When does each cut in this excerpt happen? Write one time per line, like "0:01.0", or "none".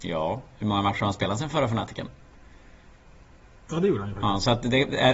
0:03.6